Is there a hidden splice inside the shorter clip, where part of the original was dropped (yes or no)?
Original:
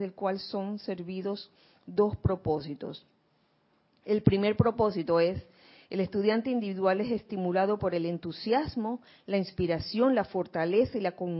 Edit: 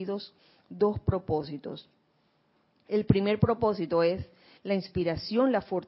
yes